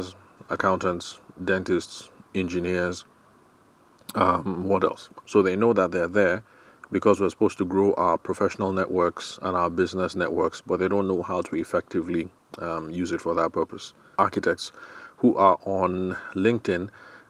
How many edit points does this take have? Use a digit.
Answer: 2